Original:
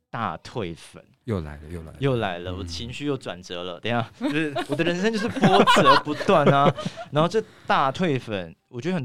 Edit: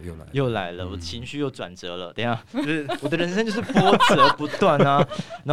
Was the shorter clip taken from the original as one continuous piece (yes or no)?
yes